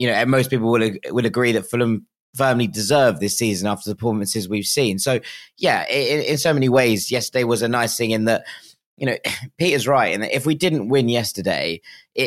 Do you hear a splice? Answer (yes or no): no